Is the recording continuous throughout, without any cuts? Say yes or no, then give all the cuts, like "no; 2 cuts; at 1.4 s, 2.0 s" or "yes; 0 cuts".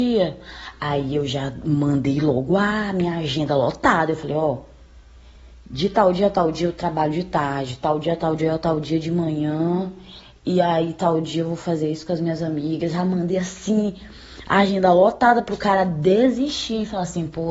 yes; 0 cuts